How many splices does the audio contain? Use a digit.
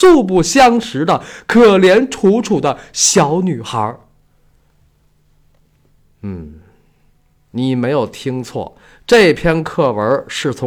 0